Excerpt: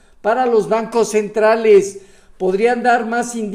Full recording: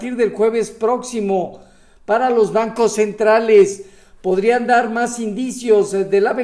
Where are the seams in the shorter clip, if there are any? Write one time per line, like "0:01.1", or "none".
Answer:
none

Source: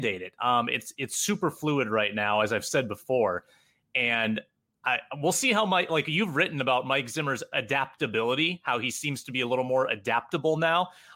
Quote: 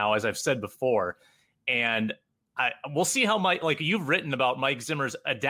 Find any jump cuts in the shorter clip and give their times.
none

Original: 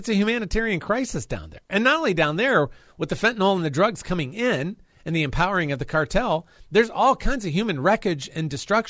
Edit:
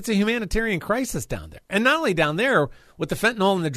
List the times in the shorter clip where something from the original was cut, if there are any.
none

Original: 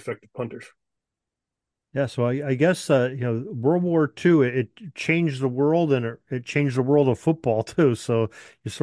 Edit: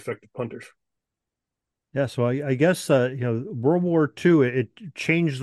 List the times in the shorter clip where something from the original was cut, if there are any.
none

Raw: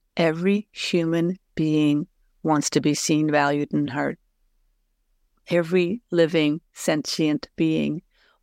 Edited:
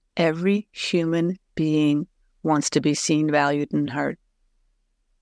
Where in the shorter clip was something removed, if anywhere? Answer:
none

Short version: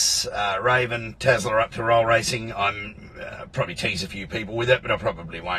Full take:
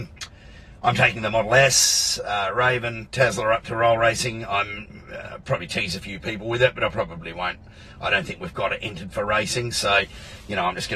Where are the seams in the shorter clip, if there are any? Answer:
none

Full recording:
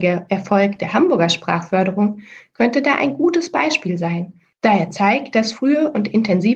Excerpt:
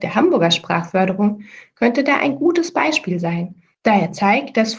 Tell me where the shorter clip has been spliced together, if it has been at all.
none

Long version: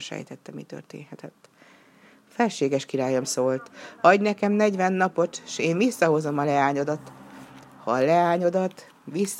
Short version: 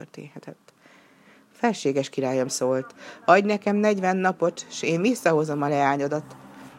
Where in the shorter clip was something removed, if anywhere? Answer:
none

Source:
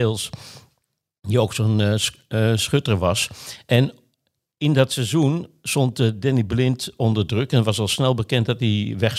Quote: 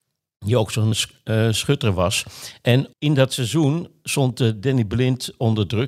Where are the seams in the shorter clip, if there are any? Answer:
0:00.9
0:02.9

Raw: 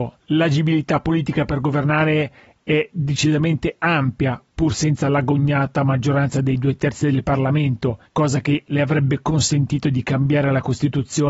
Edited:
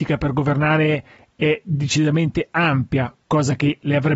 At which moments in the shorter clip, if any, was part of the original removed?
0:03.2

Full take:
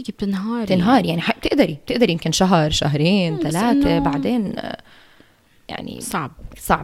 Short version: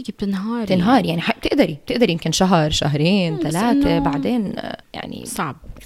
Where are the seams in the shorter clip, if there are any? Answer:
0:04.8

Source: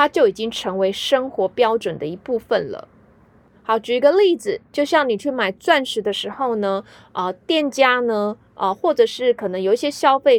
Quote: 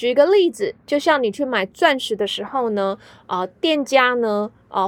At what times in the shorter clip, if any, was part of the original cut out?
none

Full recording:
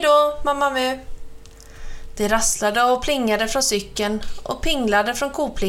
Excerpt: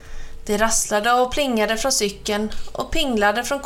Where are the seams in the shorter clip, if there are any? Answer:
none

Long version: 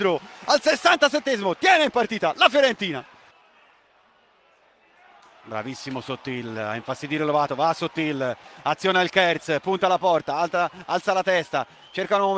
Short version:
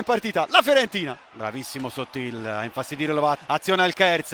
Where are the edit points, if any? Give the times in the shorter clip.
0:01.3
0:03.4

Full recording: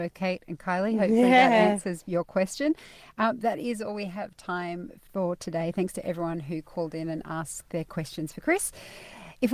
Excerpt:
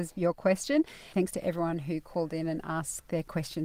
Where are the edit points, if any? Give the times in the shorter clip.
0:01.1

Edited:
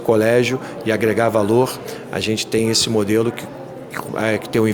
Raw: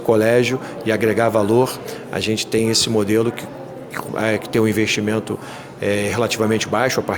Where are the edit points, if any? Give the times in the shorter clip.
none

